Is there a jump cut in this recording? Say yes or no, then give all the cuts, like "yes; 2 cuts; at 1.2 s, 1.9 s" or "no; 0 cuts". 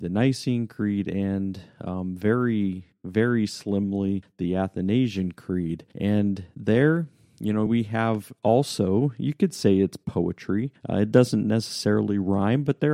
no; 0 cuts